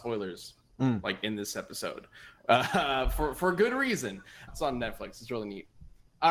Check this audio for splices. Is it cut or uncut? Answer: cut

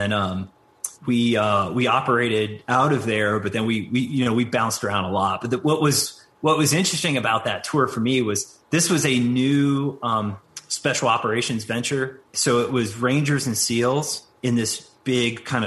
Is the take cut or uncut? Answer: cut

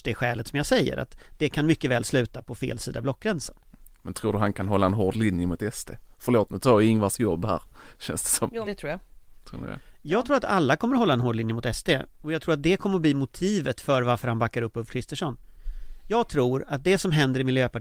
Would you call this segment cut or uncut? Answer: cut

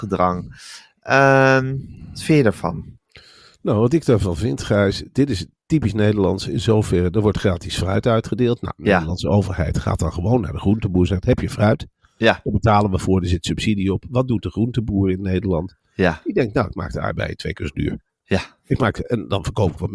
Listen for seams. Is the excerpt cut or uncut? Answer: uncut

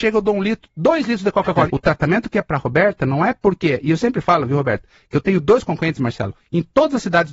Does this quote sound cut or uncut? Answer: cut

